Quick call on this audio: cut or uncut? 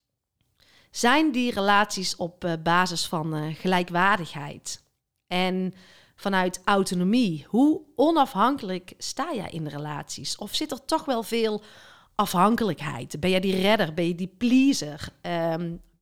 uncut